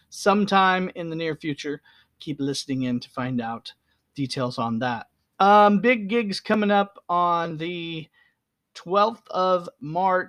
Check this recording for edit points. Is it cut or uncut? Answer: uncut